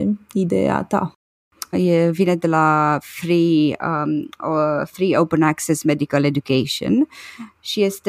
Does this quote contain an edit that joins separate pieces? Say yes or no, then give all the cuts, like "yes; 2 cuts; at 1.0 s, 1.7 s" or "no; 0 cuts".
yes; 1 cut; at 1.7 s